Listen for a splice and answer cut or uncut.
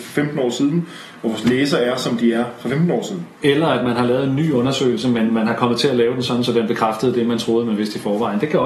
cut